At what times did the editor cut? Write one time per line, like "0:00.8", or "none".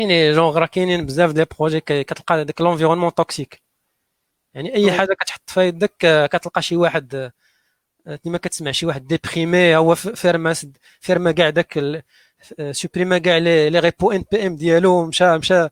none